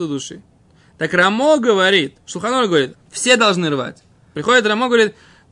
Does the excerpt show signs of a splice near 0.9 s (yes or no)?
no